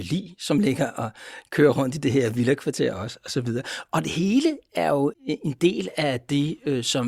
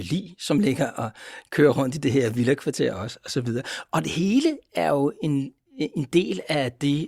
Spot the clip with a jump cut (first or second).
first